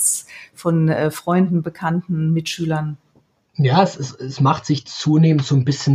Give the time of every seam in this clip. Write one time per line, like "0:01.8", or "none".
none